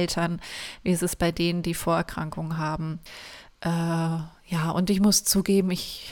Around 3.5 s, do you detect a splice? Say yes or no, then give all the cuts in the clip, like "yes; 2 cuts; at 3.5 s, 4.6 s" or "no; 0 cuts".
no; 0 cuts